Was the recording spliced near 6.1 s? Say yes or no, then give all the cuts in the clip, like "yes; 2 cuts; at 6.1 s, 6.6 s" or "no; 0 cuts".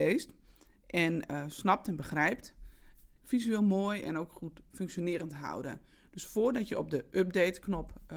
no; 1 cut; at 3.2 s